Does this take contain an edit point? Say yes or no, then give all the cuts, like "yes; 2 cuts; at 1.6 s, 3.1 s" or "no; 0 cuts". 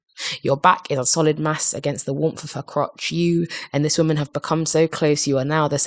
no; 0 cuts